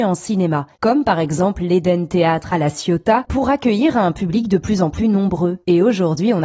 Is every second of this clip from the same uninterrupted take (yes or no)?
no